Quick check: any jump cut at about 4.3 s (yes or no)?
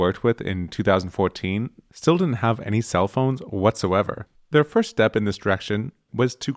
yes